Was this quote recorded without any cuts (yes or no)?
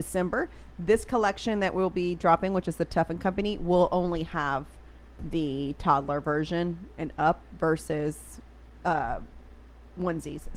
yes